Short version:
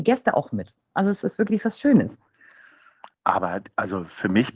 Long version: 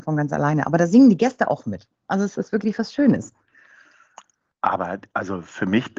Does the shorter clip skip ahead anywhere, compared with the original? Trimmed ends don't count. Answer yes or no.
yes